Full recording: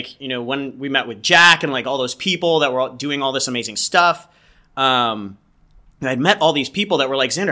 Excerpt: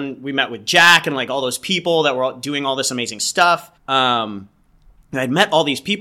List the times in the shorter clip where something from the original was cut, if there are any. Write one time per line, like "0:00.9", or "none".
0:03.8